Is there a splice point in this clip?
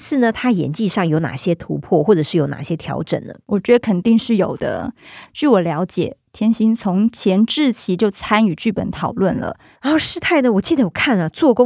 yes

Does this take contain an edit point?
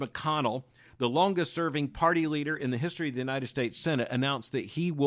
no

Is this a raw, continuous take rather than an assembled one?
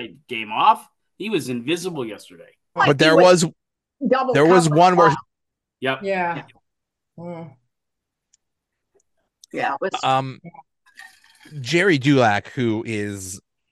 no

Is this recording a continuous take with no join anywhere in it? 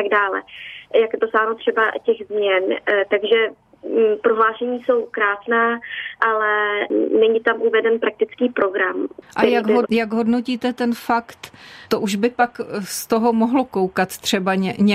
no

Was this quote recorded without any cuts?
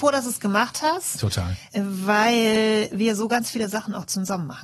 yes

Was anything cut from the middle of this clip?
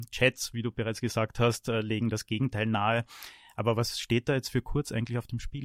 no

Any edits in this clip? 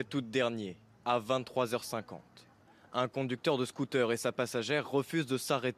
no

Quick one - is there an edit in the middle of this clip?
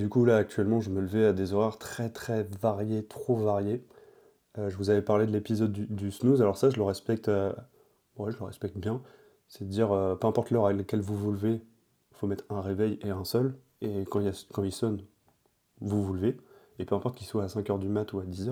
no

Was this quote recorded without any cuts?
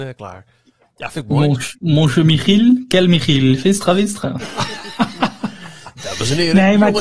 yes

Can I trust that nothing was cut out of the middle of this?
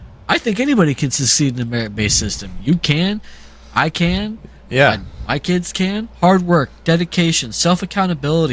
no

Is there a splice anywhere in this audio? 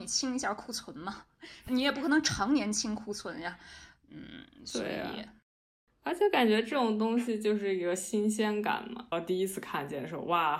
yes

